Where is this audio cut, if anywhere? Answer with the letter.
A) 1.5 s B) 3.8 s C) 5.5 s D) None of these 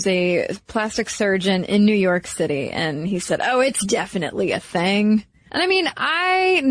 C